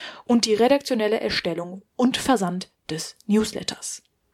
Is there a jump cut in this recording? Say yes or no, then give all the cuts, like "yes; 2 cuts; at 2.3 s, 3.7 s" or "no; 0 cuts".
no; 0 cuts